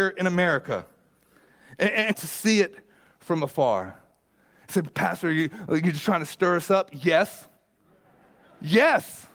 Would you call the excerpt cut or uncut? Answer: cut